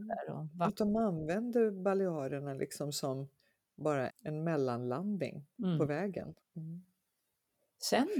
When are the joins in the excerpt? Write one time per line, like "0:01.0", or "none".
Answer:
0:04.1
0:06.4